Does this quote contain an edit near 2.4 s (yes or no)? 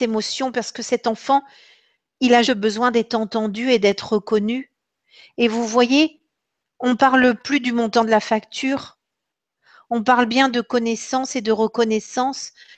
yes